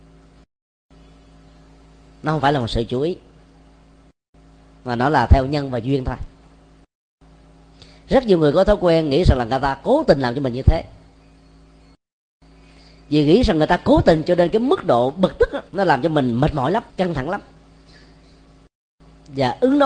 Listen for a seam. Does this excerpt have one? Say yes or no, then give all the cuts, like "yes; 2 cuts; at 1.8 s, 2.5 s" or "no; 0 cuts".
yes; 2 cuts; at 15.7 s, 16.9 s